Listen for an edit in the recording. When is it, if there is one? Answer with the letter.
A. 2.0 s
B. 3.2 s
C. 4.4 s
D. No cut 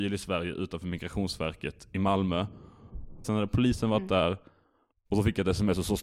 B